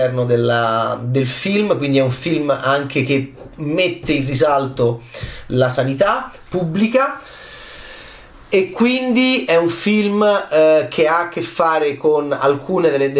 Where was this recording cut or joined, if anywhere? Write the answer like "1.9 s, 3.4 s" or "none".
none